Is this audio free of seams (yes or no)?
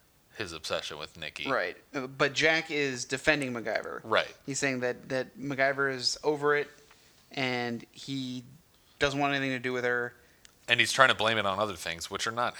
yes